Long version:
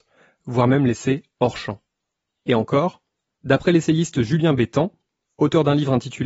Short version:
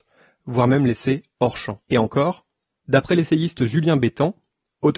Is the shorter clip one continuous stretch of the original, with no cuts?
no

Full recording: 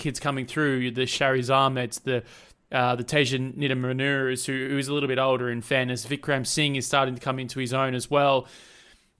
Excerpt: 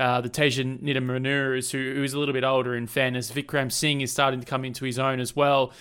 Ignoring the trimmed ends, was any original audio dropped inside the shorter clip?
no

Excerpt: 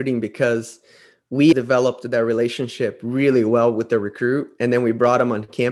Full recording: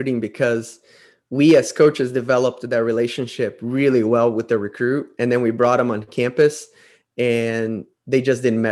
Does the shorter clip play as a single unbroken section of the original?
no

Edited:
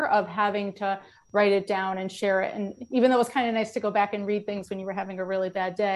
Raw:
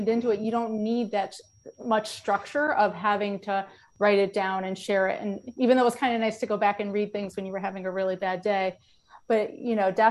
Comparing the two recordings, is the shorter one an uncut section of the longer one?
yes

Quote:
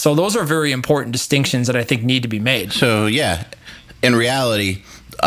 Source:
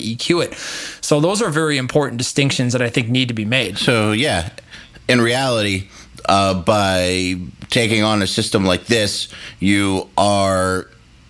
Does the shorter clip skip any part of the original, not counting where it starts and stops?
no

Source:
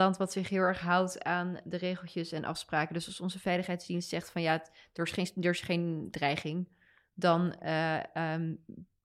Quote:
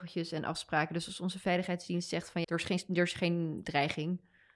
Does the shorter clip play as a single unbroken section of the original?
no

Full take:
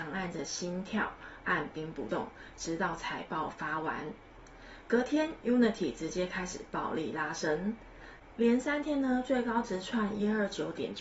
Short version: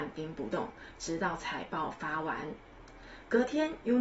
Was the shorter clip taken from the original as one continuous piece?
yes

